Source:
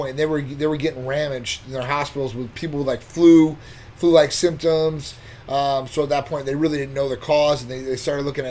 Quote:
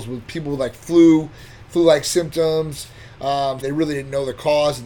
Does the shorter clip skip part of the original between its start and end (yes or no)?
yes